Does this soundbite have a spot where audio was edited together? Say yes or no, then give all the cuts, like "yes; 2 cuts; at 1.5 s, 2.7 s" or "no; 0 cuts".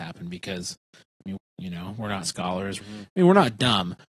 yes; 2 cuts; at 1.4 s, 2.8 s